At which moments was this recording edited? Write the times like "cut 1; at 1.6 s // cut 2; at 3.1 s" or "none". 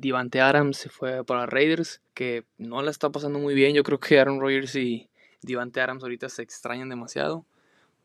cut 1; at 2.1 s

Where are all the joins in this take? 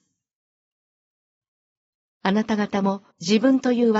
cut 1; at 3.1 s

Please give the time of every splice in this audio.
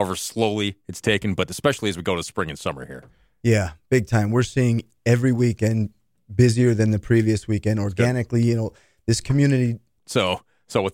cut 1; at 10.0 s

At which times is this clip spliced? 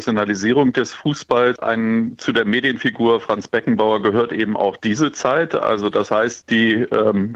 cut 1; at 1.6 s // cut 2; at 6.4 s

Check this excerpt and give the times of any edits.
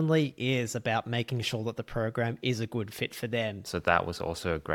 cut 1; at 3.7 s

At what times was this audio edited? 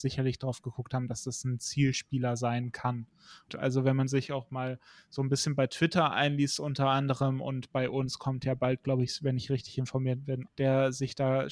cut 1; at 3.5 s // cut 2; at 10.5 s

